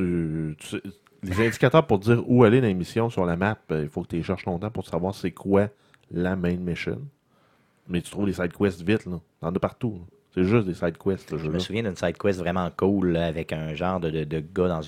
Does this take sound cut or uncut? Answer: uncut